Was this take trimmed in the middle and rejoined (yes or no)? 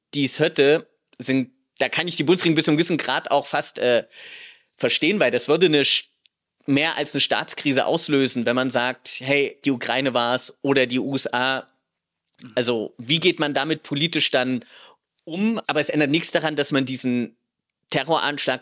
yes